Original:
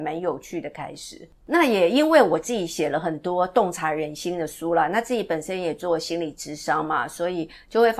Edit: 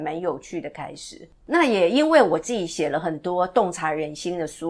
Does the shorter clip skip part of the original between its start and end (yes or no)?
no